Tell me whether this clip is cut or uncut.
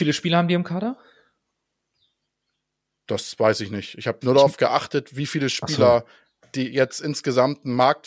uncut